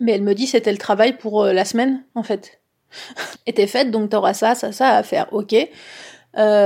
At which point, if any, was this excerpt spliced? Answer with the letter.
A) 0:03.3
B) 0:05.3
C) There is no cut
A